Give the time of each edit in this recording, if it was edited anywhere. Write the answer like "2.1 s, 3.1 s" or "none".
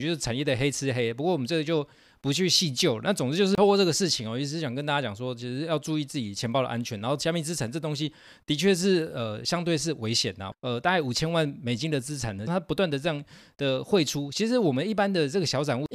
10.5 s, 12.5 s